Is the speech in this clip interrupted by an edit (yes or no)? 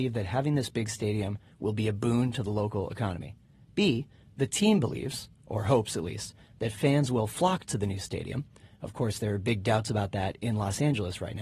no